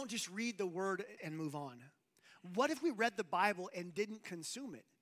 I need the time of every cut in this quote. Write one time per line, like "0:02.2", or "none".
0:01.2